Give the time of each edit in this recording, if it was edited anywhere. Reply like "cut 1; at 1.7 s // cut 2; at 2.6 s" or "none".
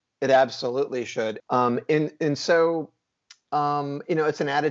cut 1; at 1.4 s